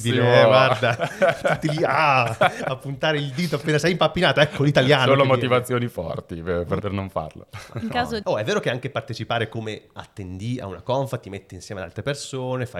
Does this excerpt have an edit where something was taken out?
yes; 2 cuts; at 6.8 s, 8.2 s

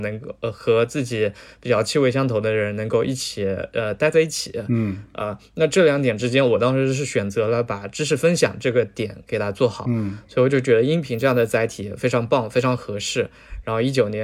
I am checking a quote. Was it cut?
no; 0 cuts

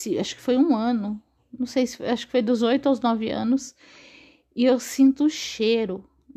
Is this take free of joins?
yes; 0 cuts

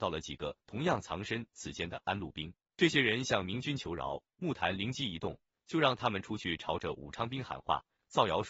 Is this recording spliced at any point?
no; 0 cuts

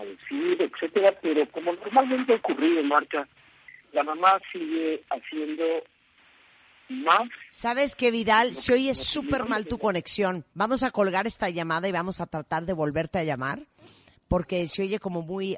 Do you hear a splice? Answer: yes; 2 cuts; at 3.8 s, 10.5 s

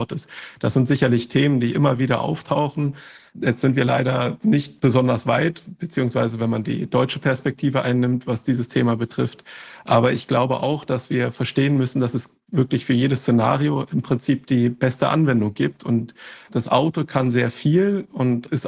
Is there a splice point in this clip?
no; 0 cuts

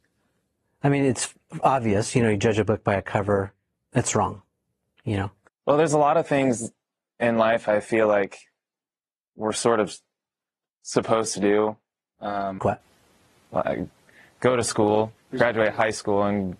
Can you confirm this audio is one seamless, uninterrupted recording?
no; 2 cuts; at 5.5 s, 12.6 s

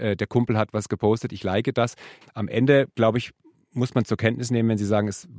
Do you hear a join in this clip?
yes; 1 cut; at 2.2 s

